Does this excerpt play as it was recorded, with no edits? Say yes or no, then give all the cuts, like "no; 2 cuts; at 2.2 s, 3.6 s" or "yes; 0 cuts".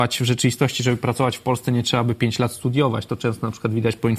yes; 0 cuts